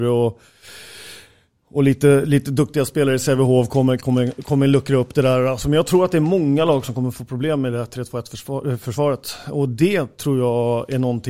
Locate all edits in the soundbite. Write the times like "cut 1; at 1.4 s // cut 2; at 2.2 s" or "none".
none